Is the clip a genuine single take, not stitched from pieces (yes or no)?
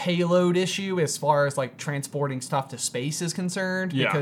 yes